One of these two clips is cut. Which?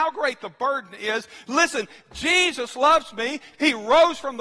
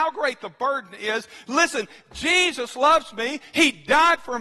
first; 1 cut; at 3.5 s

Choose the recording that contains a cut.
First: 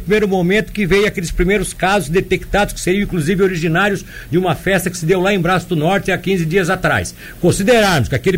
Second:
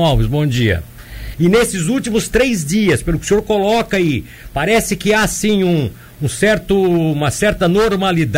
second; 1 cut; at 1.3 s

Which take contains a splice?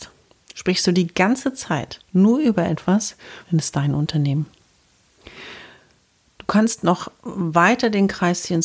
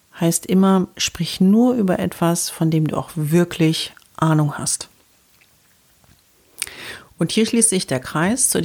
first; 2 cuts; at 2.1 s, 3.4 s

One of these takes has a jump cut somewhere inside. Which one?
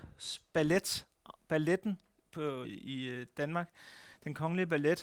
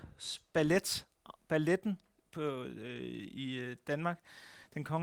first; 1 cut; at 2.6 s

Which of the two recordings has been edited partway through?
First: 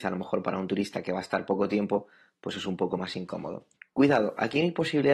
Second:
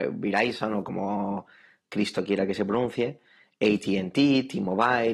first; 1 cut; at 3.8 s

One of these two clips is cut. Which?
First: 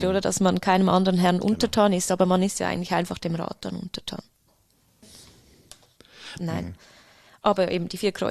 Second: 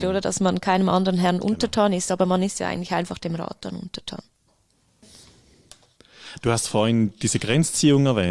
first; 1 cut; at 6.4 s

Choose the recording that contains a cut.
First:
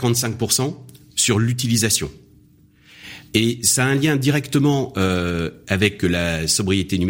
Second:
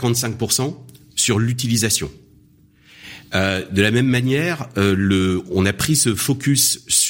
first; 1 cut; at 3.3 s

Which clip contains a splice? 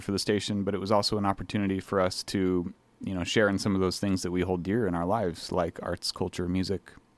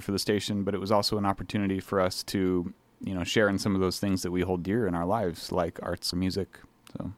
second; 1 cut; at 6.1 s

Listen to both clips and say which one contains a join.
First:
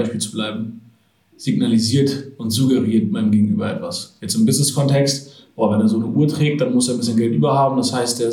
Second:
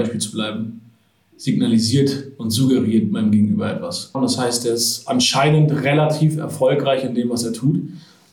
second; 1 cut; at 4.1 s

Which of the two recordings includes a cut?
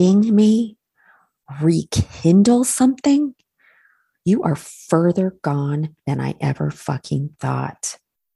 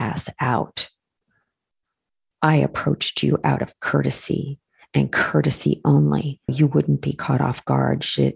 second; 1 cut; at 6.5 s

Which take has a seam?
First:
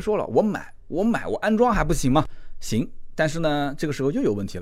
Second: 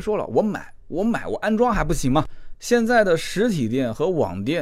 second; 1 cut; at 2.5 s

